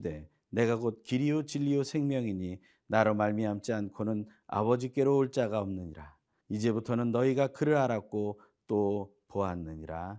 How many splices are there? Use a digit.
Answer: 1